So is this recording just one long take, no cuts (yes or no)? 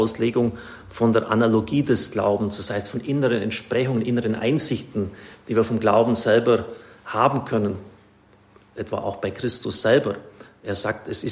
yes